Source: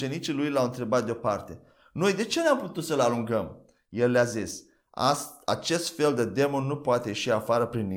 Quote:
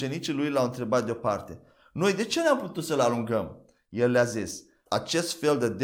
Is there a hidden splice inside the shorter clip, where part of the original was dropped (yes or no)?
yes